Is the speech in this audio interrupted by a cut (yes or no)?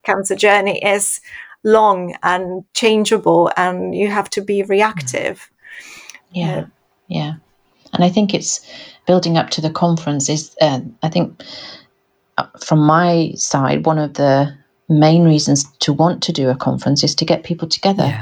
no